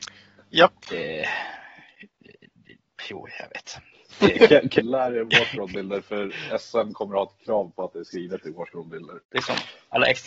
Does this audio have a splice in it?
yes; 2 cuts; at 4.8 s, 9.2 s

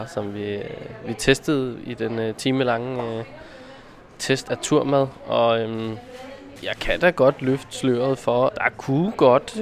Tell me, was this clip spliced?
yes; 2 cuts; at 4.5 s, 8.5 s

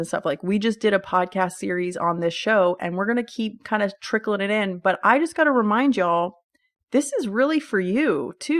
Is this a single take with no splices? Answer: yes; 0 cuts

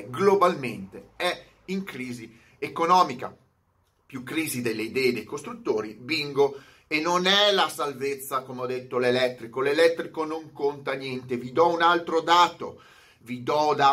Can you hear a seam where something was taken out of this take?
no; 0 cuts

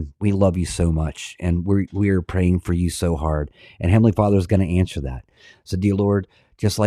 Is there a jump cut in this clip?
no; 0 cuts

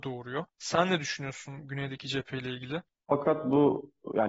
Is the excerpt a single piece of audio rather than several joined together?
no; 1 cut; at 3.0 s

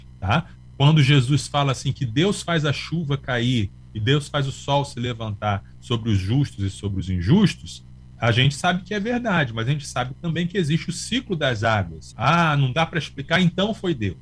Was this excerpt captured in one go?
no; 1 cut; at 12.1 s

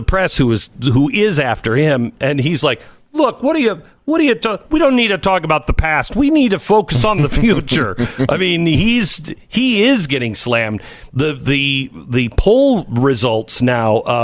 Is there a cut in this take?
no; 0 cuts

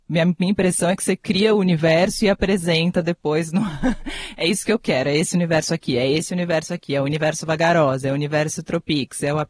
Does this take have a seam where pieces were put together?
no; 0 cuts

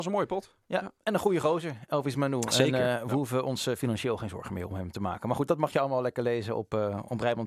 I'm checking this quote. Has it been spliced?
no; 0 cuts

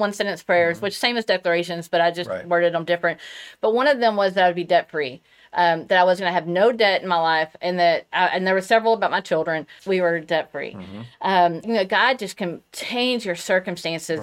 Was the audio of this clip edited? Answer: yes; 2 cuts; at 9.8 s, 11.6 s

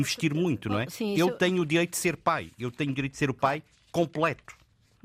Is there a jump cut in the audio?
no; 0 cuts

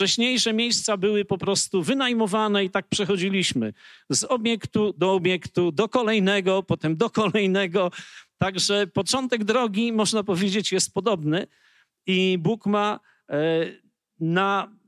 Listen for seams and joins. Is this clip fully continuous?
yes; 0 cuts

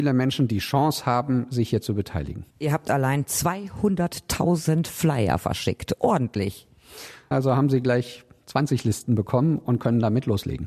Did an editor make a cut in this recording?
yes; 2 cuts; at 2.5 s, 7.3 s

